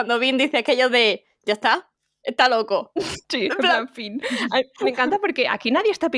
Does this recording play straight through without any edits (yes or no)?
no